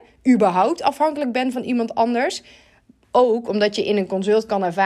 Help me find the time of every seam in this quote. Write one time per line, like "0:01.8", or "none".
0:03.0